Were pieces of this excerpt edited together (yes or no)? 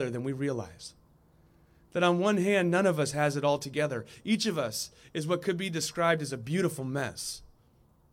no